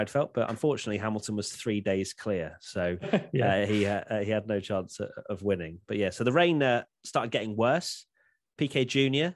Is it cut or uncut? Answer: uncut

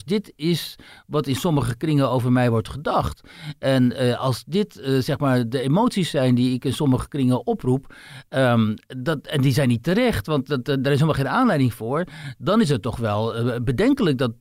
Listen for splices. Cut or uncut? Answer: uncut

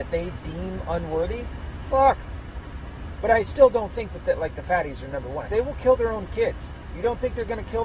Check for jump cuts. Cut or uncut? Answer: cut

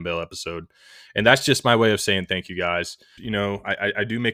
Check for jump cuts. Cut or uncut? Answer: cut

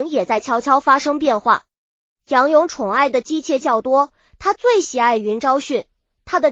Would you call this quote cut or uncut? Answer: uncut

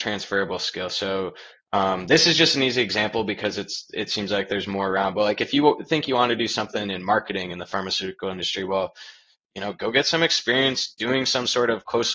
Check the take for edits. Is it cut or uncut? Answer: uncut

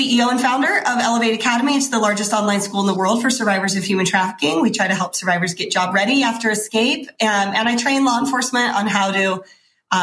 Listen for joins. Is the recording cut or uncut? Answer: uncut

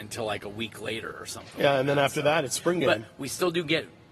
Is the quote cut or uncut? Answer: uncut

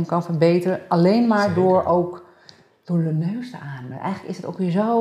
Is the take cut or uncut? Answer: uncut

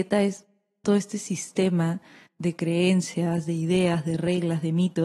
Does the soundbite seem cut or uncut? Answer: uncut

